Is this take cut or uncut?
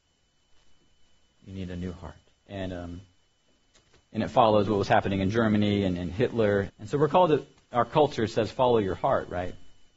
cut